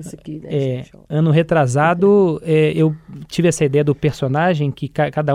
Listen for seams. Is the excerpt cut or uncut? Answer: uncut